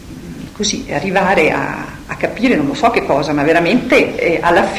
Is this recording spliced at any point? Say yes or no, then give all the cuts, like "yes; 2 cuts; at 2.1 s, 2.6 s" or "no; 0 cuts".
no; 0 cuts